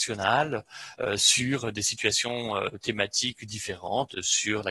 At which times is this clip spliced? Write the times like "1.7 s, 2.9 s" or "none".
none